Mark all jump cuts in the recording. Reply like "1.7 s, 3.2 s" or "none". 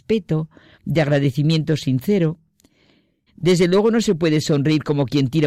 3.3 s